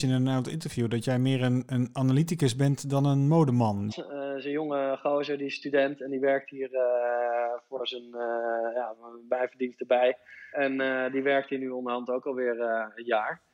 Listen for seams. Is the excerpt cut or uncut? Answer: cut